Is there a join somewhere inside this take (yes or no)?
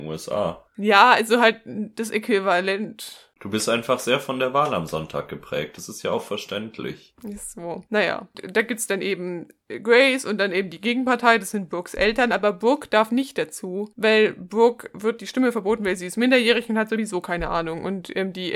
no